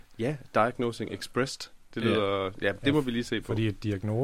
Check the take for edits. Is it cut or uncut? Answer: uncut